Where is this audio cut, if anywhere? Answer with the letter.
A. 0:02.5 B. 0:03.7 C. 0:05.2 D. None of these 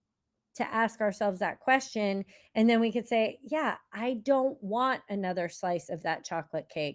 D